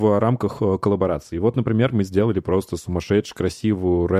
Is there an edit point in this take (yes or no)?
no